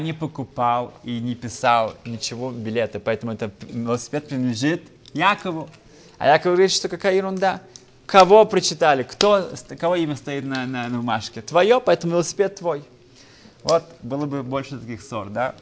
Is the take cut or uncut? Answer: uncut